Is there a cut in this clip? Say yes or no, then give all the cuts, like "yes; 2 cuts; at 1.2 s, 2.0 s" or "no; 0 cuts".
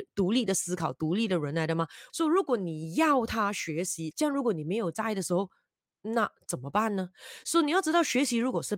yes; 2 cuts; at 2.1 s, 4.1 s